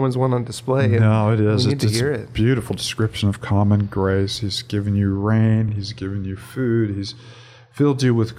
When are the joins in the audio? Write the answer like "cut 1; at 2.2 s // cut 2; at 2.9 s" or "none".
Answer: none